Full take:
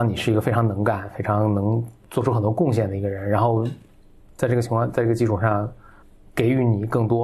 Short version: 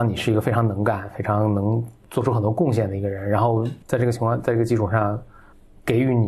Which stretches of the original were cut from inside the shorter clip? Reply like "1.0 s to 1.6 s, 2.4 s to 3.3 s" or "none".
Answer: 3.8 s to 4.3 s